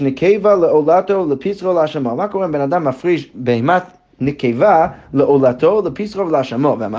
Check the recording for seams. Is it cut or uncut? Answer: uncut